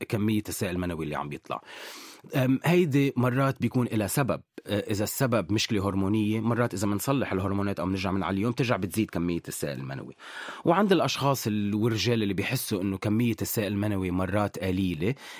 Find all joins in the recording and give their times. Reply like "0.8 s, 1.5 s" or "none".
4.6 s